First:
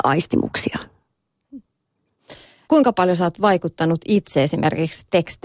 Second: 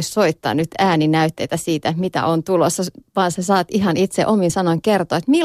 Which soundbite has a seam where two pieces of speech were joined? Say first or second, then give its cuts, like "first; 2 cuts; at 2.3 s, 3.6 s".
first; 1 cut; at 2.7 s